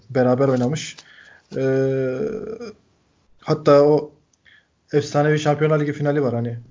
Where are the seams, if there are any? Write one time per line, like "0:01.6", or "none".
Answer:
none